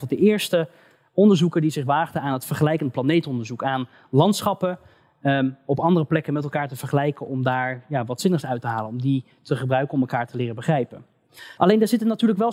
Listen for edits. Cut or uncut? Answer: cut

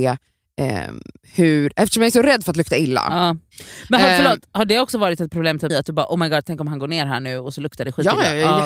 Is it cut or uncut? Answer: cut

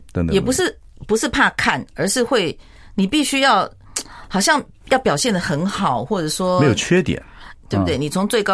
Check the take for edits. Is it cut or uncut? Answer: cut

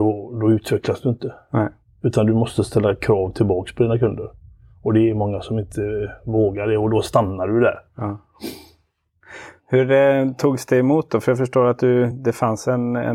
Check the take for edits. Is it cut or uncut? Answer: uncut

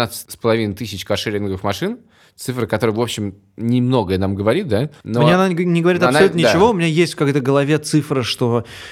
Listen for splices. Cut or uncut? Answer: uncut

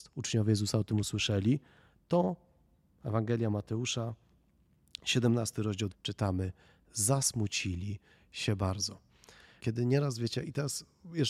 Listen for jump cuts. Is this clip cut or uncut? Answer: cut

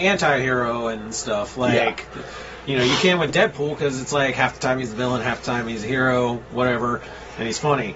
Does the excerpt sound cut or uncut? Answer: uncut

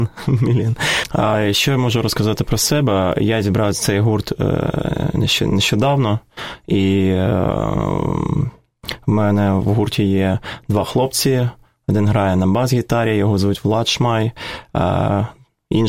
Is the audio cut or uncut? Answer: uncut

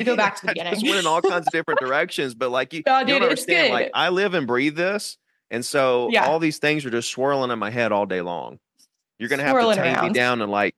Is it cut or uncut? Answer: uncut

